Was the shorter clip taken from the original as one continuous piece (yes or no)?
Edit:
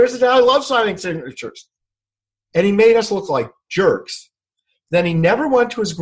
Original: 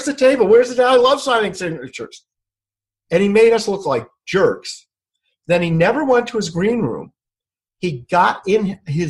yes